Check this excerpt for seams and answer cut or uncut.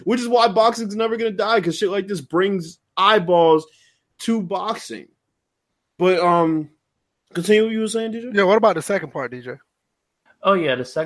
uncut